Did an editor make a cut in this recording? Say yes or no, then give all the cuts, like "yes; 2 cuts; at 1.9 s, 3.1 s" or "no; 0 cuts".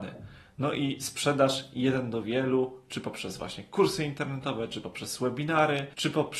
no; 0 cuts